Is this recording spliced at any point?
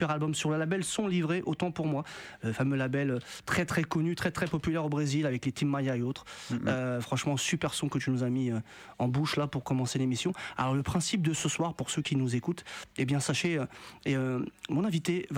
no; 0 cuts

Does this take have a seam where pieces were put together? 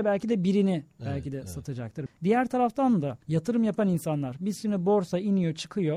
yes; 2 cuts; at 2.1 s, 3.2 s

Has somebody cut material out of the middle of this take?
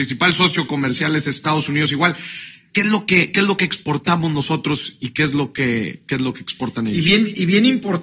yes; 1 cut; at 2.7 s

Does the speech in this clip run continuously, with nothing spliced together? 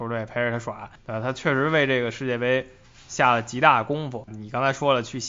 no; 1 cut; at 4.3 s

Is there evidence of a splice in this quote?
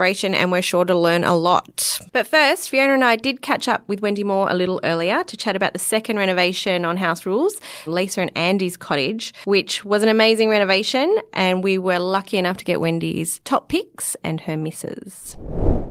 yes; 1 cut; at 7.9 s

